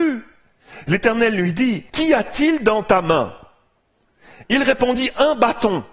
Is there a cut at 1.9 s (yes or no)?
yes